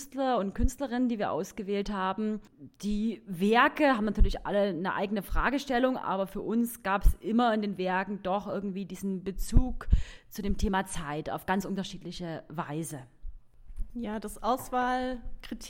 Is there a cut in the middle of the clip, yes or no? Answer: yes